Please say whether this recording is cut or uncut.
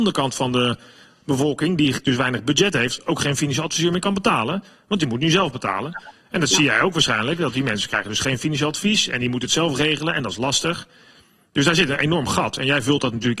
uncut